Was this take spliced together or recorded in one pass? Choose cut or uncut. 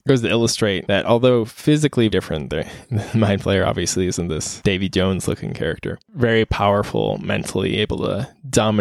cut